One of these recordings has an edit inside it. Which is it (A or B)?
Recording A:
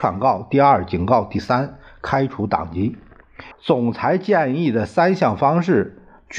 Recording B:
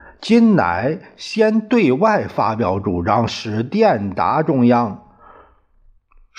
A